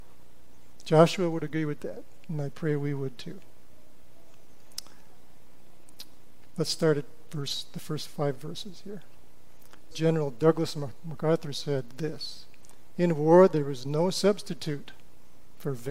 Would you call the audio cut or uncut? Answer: cut